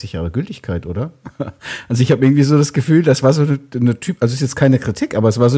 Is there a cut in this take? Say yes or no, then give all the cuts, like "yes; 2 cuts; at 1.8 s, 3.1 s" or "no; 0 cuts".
no; 0 cuts